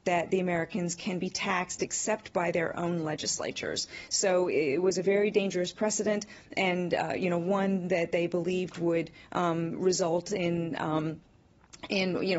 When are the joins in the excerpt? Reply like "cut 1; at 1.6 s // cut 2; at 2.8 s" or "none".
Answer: none